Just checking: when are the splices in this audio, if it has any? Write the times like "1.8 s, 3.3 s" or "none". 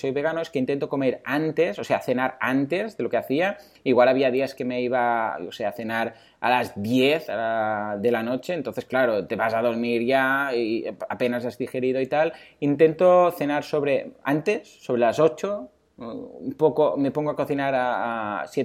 none